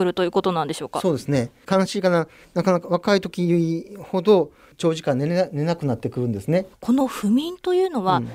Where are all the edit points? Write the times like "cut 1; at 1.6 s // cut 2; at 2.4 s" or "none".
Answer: cut 1; at 6.7 s